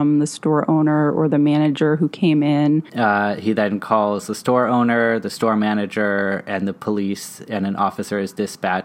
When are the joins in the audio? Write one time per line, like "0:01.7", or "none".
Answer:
0:02.9